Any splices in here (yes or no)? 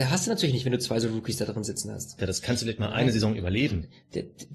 yes